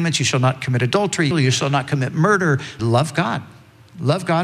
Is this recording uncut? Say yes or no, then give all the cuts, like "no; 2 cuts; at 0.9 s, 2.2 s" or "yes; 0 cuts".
no; 2 cuts; at 1.3 s, 2.8 s